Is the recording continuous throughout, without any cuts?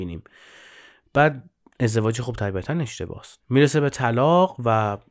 no; 1 cut; at 3.4 s

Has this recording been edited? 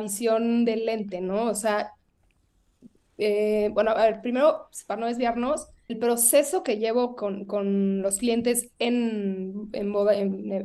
yes; 1 cut; at 5.9 s

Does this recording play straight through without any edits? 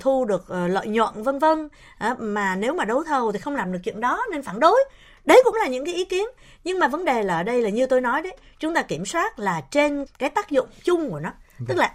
no; 1 cut; at 10.1 s

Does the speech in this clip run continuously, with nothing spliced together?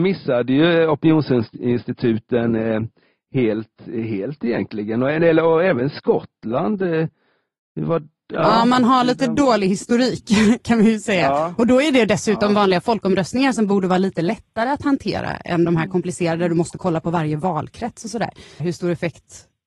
no; 1 cut; at 18.6 s

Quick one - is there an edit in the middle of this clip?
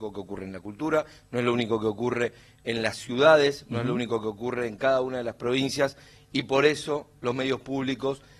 no; 0 cuts

